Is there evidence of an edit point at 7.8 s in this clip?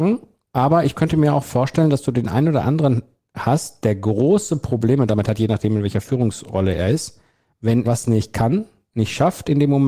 yes; 1 cut; at 7.8 s

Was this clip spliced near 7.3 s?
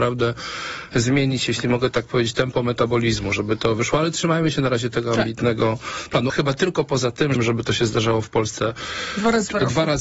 yes; 2 cuts; at 6.3 s, 7.3 s

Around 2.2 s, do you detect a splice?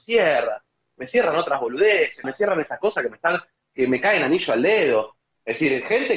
yes; 1 cut; at 2.2 s

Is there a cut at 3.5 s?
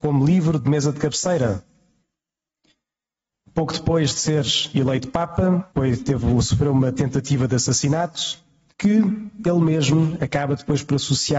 no; 2 cuts; at 5.7 s, 8.7 s

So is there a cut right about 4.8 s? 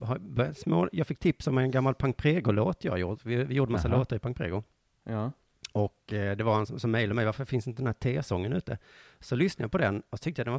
no; 1 cut; at 6.7 s

